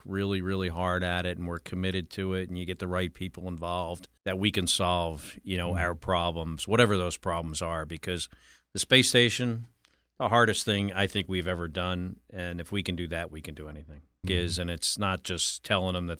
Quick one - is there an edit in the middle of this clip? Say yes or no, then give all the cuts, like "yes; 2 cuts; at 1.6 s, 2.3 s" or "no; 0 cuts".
yes; 2 cuts; at 4.2 s, 14.2 s